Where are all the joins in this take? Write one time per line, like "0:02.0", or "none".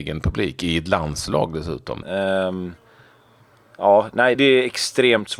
0:02.0
0:04.4